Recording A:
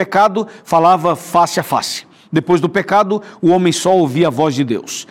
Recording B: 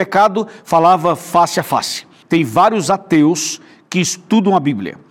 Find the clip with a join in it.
B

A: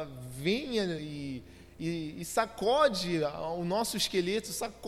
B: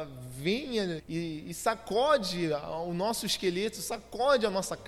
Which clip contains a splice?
B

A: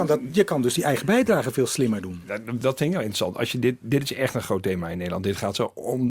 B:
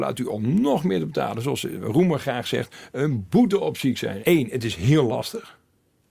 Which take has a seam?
B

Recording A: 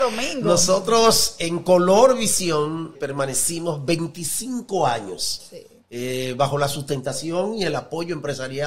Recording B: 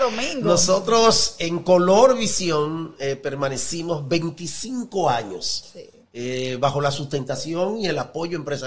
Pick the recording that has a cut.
A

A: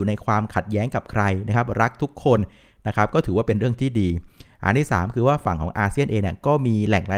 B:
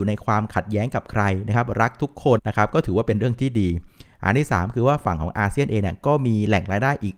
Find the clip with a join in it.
B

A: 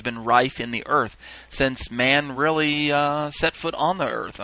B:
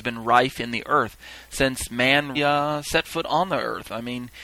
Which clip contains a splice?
B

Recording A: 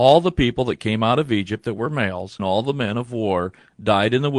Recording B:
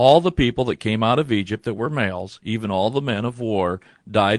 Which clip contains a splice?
A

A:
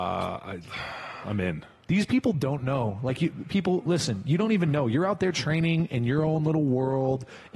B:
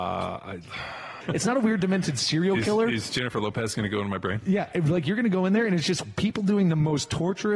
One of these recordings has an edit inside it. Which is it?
B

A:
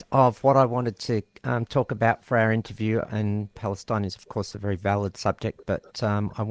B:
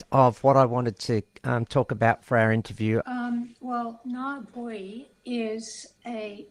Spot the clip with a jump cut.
B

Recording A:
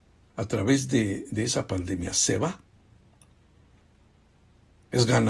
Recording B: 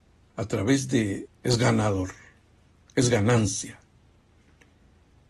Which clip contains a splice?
B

